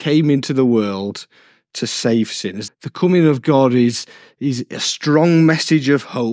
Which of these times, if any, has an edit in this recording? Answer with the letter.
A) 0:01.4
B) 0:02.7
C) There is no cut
B